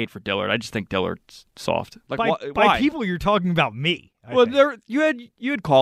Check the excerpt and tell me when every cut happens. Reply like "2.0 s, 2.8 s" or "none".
2.0 s